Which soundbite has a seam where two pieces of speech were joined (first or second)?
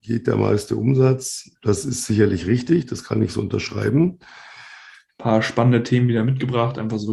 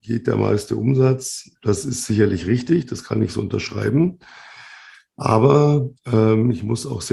first